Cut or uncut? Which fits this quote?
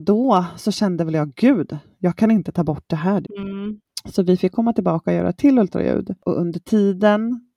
cut